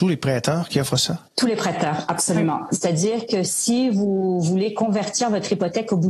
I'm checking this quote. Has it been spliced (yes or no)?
yes